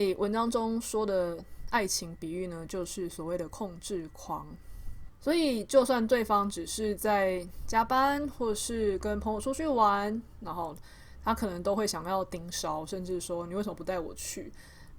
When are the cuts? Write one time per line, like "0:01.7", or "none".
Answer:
0:05.1

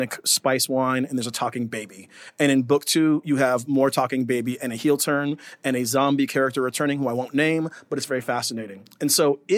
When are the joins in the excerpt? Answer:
none

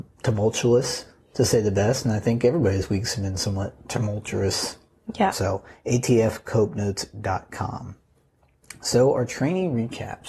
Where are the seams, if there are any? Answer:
0:05.3

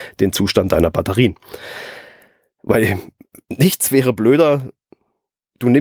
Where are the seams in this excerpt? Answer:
none

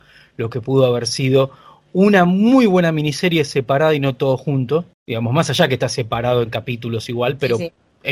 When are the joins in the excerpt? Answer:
0:04.9

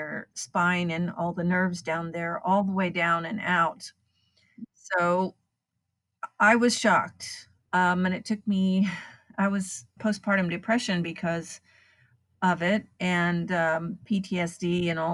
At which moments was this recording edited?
0:07.6
0:10.0

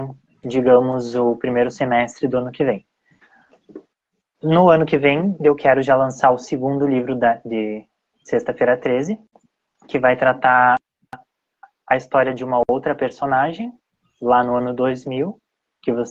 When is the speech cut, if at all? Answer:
none

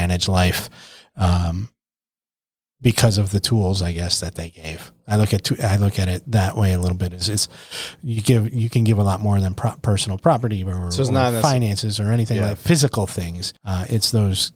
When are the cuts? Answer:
0:13.6

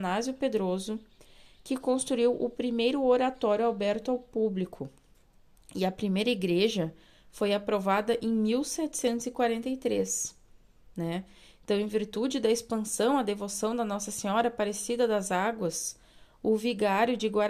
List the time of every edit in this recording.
none

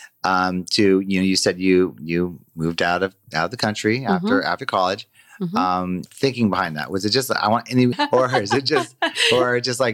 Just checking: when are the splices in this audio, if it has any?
0:06.1
0:07.9

